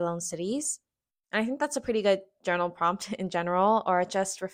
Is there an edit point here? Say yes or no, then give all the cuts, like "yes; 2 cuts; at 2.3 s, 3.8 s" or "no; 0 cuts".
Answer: yes; 1 cut; at 1.1 s